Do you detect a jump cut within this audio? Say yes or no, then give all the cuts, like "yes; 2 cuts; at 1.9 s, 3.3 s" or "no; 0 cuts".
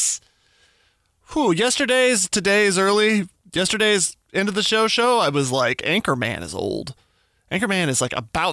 no; 0 cuts